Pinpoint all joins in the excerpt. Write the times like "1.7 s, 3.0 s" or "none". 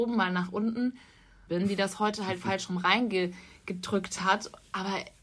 1.5 s